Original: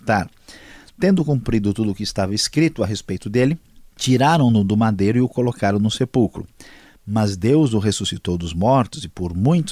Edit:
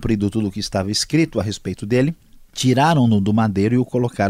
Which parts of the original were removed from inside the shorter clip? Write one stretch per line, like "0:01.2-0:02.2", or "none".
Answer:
none

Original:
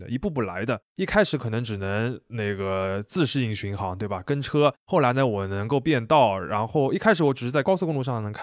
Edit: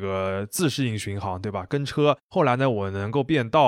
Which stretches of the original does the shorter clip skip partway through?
none

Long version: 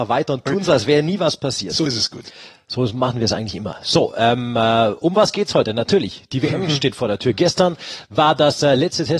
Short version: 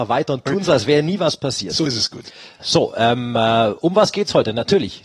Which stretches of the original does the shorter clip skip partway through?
0:02.6-0:03.8

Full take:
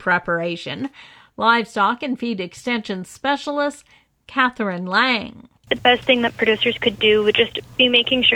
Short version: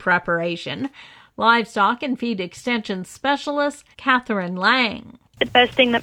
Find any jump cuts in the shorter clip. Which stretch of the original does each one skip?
0:03.9-0:04.2

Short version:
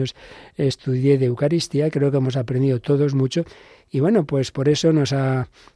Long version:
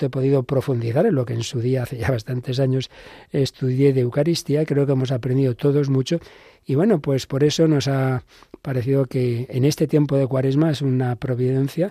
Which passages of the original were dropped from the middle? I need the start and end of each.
none

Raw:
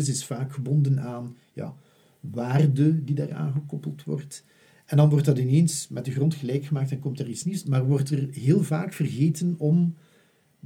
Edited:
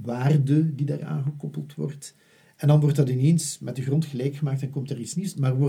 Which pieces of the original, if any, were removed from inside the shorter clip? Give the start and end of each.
none

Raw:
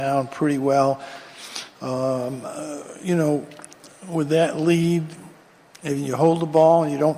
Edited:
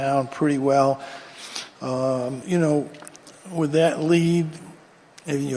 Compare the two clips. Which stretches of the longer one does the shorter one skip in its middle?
0:02.4-0:03.0

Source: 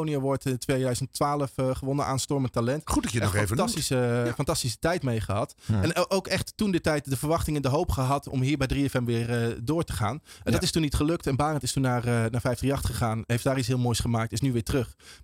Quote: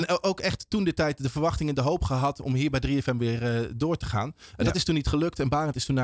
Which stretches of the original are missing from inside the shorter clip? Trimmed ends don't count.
none

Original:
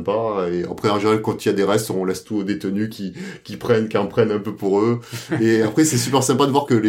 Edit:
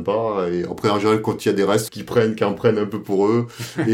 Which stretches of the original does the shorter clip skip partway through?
0:01.9-0:03.4

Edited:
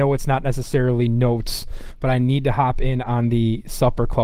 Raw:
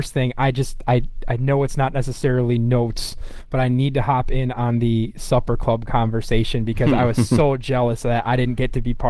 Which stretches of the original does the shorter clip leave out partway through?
none

